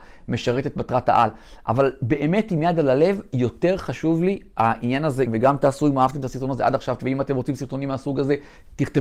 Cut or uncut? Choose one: cut